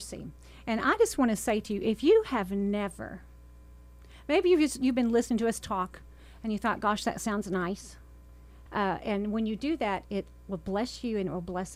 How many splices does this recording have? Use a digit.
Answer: 1